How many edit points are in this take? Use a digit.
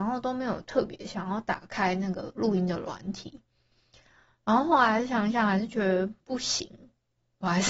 0